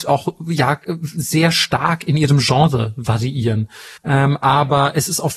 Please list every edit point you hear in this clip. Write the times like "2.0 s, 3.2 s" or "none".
4.0 s